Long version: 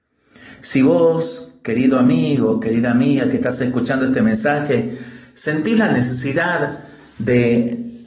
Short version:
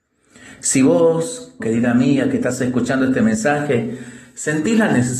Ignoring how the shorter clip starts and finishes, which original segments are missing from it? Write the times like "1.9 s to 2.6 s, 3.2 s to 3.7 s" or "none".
1.6 s to 2.6 s